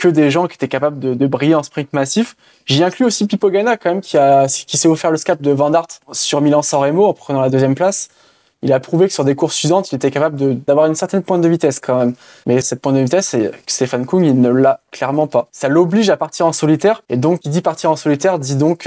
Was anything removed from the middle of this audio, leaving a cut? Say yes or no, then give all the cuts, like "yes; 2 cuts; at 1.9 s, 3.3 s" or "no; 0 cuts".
no; 0 cuts